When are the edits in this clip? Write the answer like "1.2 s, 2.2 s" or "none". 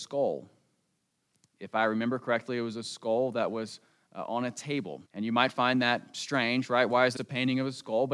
5.1 s, 7.2 s